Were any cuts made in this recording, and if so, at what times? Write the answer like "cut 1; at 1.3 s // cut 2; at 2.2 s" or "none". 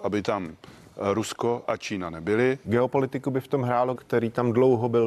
cut 1; at 2.6 s // cut 2; at 3.9 s

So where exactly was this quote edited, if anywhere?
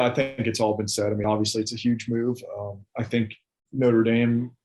none

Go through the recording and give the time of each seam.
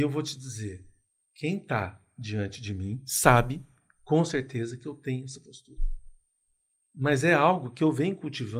none

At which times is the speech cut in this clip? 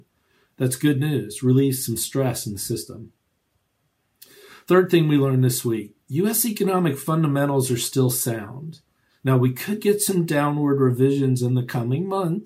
none

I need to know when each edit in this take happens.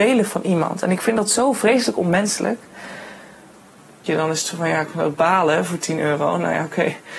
cut 1; at 4.1 s

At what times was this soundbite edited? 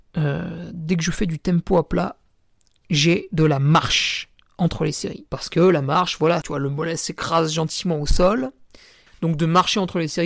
cut 1; at 5.3 s // cut 2; at 6.4 s // cut 3; at 9.1 s

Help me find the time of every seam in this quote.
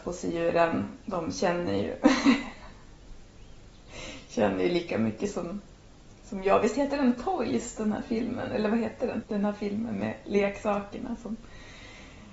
cut 1; at 9.2 s

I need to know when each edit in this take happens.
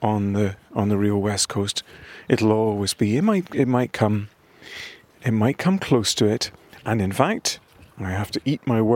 none

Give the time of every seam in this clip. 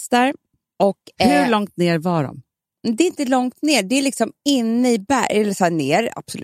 none

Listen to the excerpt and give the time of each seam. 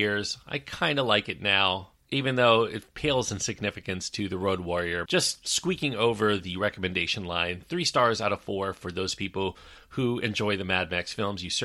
cut 1; at 5.1 s

